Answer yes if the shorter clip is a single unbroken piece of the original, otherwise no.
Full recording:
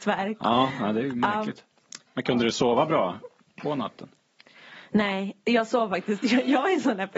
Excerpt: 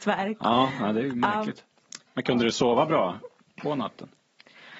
yes